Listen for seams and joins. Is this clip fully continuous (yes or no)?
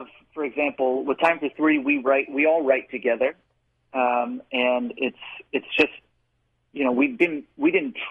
yes